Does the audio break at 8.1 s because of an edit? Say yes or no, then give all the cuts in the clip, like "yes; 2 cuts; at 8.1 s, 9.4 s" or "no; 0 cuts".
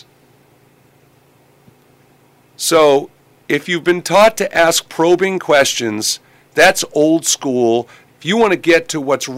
yes; 1 cut; at 8.1 s